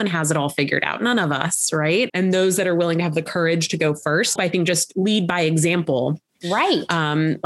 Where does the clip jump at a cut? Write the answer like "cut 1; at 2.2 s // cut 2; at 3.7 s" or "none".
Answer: cut 1; at 2.1 s // cut 2; at 4.4 s // cut 3; at 6.4 s